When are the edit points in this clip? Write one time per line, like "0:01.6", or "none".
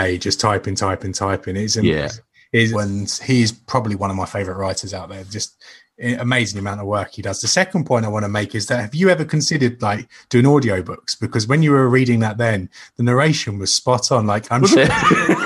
0:02.7